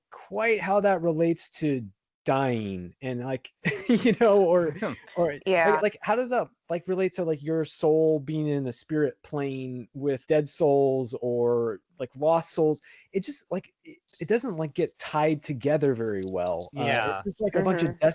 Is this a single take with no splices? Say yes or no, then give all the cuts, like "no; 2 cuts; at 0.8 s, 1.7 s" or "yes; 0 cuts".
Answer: no; 3 cuts; at 5.8 s, 10.2 s, 14.1 s